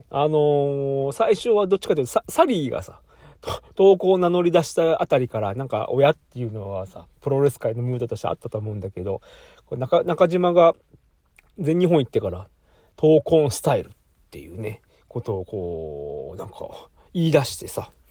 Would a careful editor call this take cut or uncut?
uncut